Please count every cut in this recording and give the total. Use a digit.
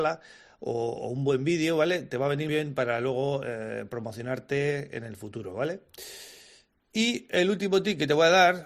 1